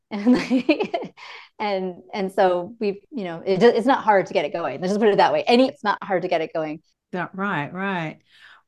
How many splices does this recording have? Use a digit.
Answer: 2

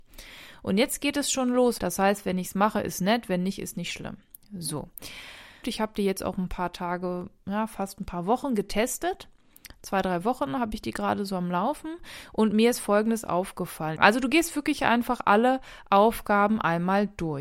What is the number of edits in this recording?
3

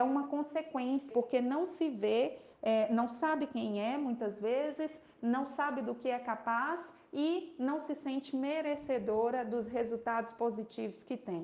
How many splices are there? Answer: 1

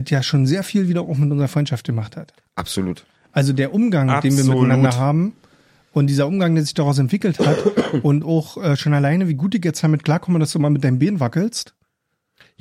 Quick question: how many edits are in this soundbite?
0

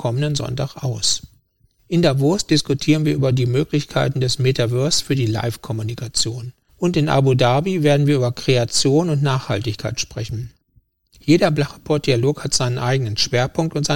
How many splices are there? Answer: 0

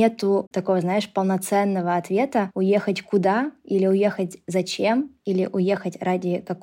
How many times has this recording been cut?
0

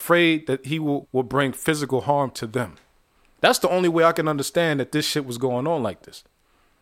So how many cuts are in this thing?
1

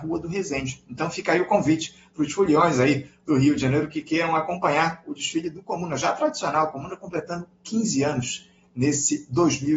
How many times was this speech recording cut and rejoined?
0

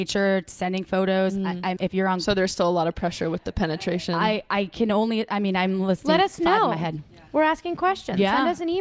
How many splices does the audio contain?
1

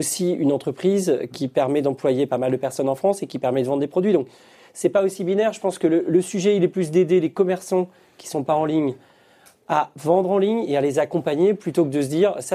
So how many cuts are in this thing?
1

